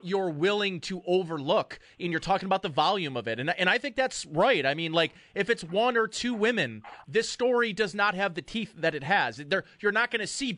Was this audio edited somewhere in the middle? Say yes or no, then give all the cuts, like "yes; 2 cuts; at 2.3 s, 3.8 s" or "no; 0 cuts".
yes; 1 cut; at 7.0 s